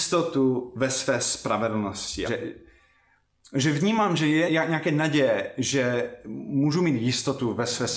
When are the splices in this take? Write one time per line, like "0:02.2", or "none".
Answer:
0:02.2
0:04.5

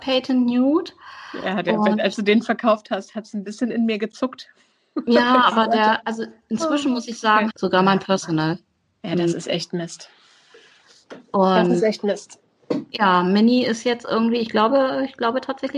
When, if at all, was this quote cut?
0:07.5

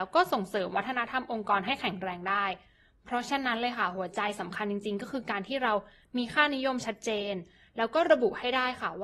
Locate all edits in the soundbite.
none

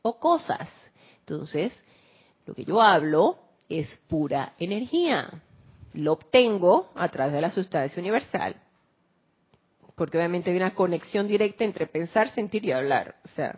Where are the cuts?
none

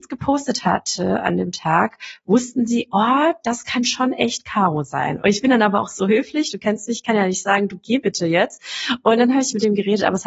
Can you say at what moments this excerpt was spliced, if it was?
0:05.2

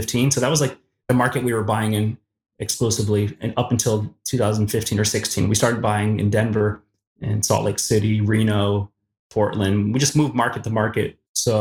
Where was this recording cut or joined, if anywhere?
none

